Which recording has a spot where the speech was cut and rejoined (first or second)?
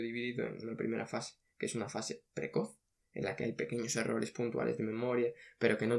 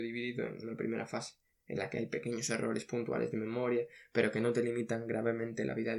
second